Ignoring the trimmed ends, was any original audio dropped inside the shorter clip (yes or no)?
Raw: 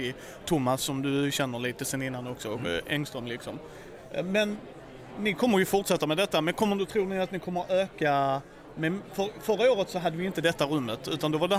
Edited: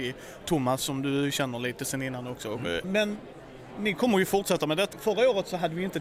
yes